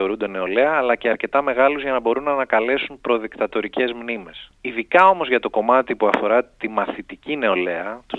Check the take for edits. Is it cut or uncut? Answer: cut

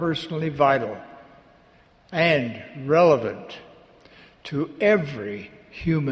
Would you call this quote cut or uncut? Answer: uncut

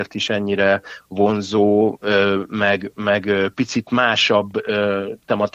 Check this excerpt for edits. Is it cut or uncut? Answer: uncut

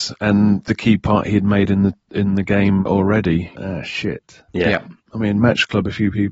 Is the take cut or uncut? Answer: cut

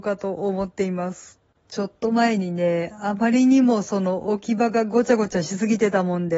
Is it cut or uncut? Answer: cut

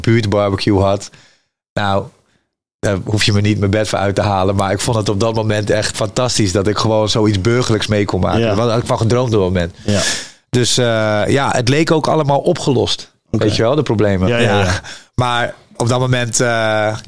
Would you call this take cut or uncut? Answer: cut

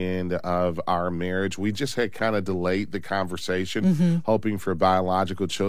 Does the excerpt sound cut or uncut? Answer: uncut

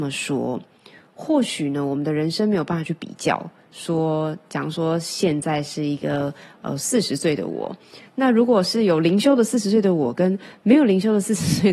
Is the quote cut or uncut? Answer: uncut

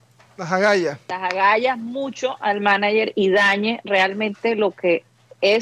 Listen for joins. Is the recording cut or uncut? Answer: uncut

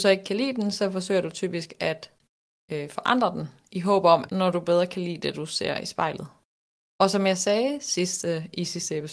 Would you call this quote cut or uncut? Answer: cut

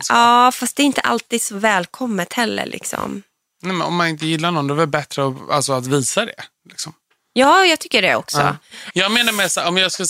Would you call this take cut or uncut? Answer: cut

